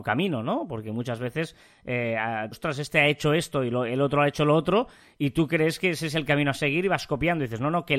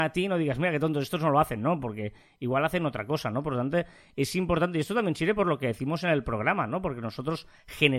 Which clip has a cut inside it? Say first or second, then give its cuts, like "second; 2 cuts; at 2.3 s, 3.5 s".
first; 1 cut; at 2.5 s